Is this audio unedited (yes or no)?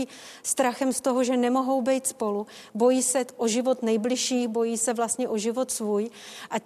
yes